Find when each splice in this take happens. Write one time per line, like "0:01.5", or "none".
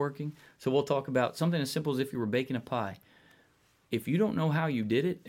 none